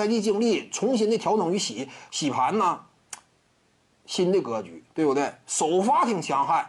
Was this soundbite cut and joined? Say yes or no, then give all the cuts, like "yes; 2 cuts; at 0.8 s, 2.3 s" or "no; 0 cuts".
no; 0 cuts